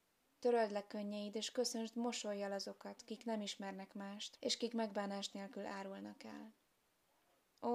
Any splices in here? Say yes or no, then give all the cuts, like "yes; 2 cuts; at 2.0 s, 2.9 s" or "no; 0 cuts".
yes; 1 cut; at 4.4 s